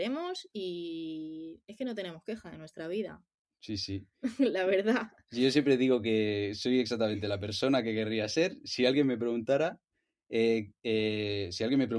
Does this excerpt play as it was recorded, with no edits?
yes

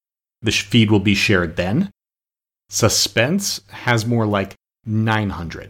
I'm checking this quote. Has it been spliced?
yes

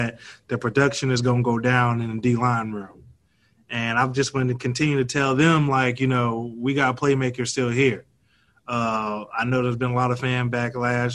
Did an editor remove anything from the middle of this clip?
no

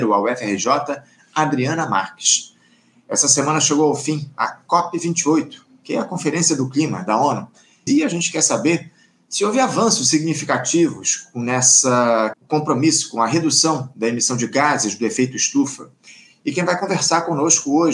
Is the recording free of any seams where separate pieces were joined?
no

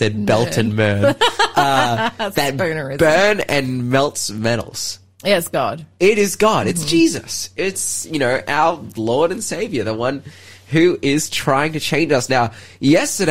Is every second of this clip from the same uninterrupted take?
yes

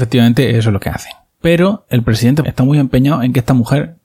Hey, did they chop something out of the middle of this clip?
yes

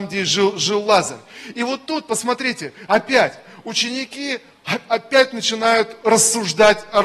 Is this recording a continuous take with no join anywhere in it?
yes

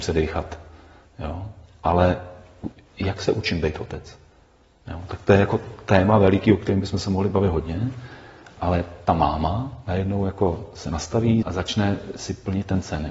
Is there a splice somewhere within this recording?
yes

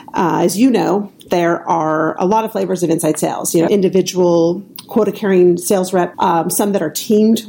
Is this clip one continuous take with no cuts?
no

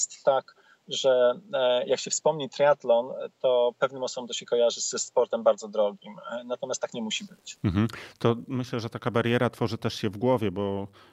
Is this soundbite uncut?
yes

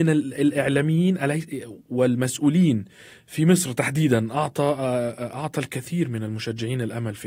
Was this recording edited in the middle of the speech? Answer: no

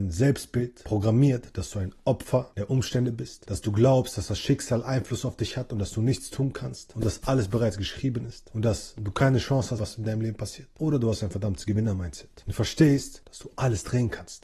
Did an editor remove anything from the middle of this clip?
yes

